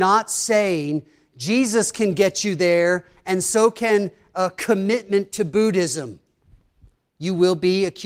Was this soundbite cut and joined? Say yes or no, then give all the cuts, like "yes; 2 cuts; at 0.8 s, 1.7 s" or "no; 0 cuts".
yes; 1 cut; at 7.1 s